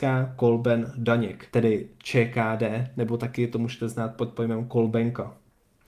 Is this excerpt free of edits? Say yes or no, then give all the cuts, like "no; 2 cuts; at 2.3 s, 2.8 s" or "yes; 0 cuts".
no; 1 cut; at 1.5 s